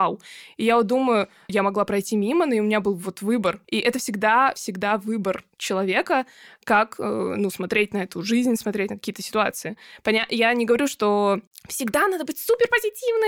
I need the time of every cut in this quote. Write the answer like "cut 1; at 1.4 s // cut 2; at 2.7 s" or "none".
cut 1; at 1.5 s // cut 2; at 3.6 s